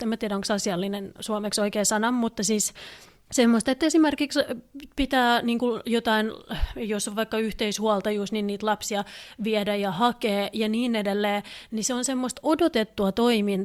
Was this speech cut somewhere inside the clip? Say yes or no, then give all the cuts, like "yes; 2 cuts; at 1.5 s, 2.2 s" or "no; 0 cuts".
no; 0 cuts